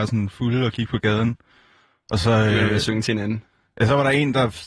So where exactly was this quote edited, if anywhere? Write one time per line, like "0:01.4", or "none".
none